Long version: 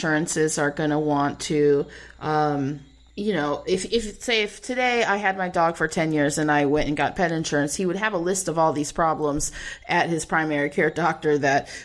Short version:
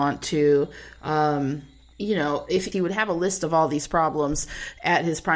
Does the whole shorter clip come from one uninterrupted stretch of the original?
no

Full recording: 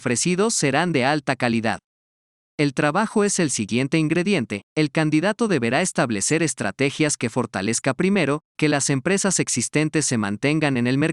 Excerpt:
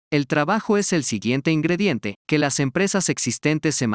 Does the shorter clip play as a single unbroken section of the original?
no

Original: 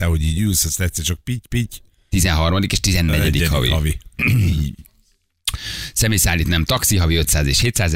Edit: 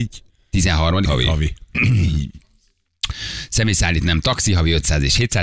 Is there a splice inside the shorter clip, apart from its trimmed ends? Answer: yes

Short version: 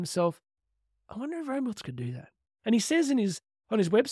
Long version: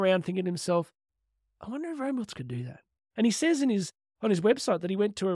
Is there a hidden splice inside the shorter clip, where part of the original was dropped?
no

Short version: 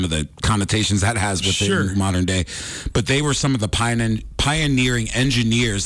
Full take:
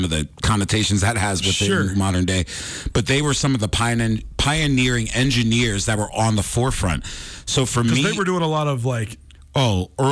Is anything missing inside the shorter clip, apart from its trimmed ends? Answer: no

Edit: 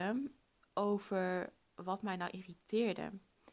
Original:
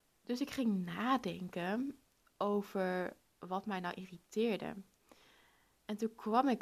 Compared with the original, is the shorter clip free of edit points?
yes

